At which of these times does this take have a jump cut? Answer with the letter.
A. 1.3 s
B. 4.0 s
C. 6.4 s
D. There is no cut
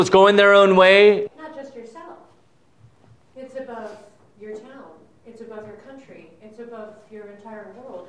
A